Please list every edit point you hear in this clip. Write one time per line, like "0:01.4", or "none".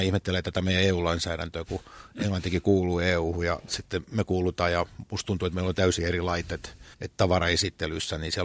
0:06.9